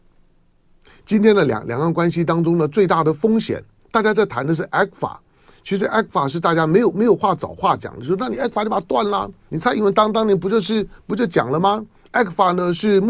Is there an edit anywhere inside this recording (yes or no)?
no